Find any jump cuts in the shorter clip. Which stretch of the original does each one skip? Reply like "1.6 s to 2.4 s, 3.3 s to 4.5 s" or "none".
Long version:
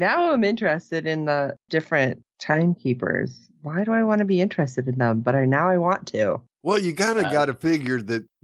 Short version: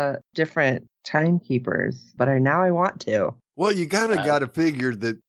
3.5 s to 5.2 s